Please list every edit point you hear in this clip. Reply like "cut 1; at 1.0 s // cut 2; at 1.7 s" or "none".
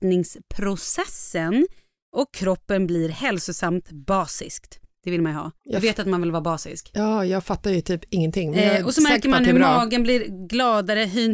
cut 1; at 5.6 s